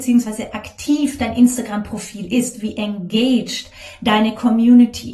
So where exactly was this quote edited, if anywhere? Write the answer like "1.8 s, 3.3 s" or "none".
none